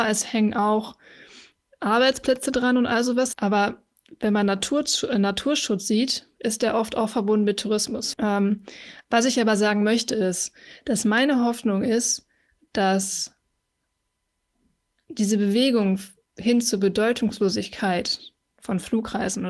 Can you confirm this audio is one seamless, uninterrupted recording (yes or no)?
no